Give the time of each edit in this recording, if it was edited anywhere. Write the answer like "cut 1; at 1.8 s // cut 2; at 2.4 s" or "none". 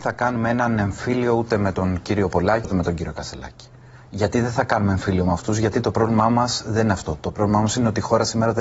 cut 1; at 2.6 s